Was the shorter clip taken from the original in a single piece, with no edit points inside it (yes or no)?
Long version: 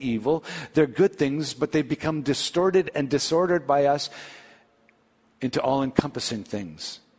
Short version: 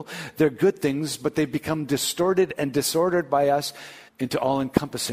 no